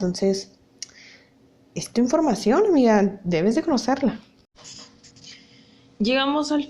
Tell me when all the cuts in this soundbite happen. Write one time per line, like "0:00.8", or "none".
none